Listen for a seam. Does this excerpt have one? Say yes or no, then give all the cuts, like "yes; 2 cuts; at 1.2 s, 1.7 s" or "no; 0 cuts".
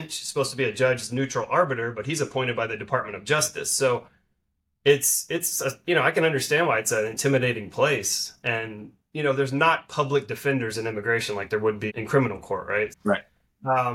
yes; 2 cuts; at 11.9 s, 12.9 s